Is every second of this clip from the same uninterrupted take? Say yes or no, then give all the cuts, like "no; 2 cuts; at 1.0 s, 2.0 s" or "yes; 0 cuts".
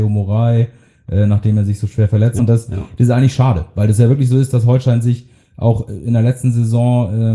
no; 1 cut; at 2.4 s